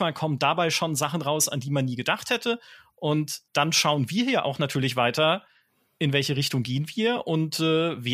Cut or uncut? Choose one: cut